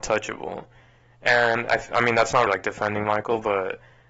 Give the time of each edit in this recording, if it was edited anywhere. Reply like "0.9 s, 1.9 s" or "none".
2.5 s